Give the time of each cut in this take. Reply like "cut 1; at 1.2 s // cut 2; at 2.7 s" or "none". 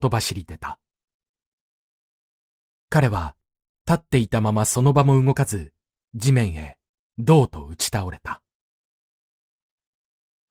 none